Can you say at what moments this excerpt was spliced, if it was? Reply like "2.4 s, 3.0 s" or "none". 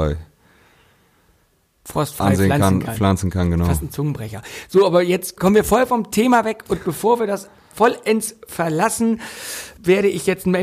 none